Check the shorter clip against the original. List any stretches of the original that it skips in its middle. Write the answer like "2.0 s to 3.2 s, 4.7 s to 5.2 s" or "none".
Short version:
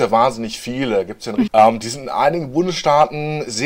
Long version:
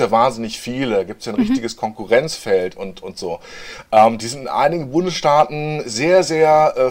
1.5 s to 3.9 s